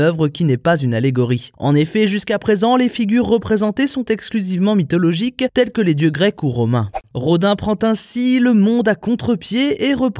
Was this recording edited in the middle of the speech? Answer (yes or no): no